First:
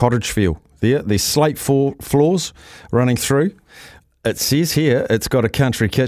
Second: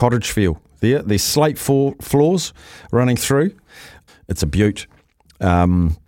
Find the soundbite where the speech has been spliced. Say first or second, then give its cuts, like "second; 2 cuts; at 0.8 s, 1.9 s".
second; 1 cut; at 4.1 s